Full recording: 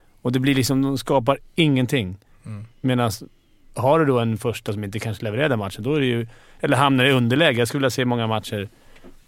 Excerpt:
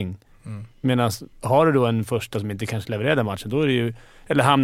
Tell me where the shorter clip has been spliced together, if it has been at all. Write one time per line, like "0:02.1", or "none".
0:01.3